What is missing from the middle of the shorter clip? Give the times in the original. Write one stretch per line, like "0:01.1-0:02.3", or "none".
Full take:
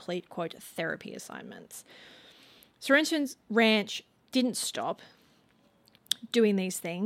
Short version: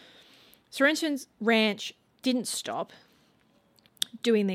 none